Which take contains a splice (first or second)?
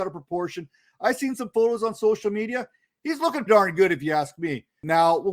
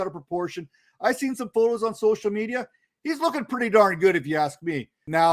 first